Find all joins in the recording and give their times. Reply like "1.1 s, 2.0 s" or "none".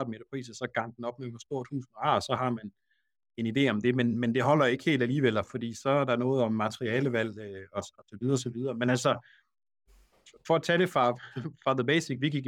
none